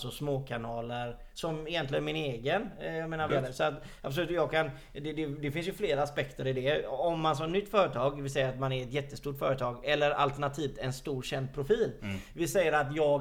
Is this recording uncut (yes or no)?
no